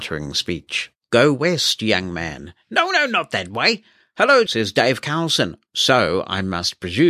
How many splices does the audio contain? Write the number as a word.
two